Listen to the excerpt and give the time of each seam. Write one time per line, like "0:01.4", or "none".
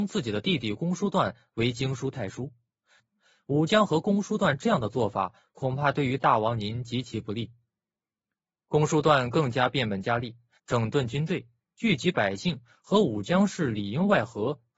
0:03.0
0:08.0
0:10.6